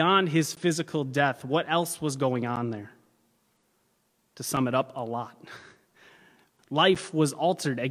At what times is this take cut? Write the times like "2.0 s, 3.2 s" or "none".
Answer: 6.6 s